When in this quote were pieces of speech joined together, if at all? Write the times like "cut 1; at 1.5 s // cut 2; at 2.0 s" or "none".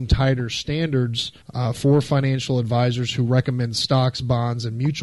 cut 1; at 1.4 s